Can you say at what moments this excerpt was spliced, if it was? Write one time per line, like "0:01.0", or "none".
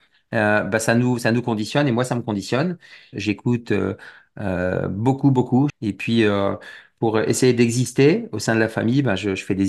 0:03.1
0:05.7